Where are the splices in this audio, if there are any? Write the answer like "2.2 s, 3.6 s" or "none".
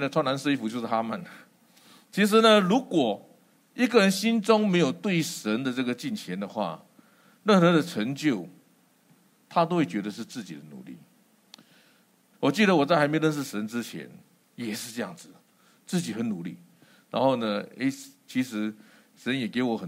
12.3 s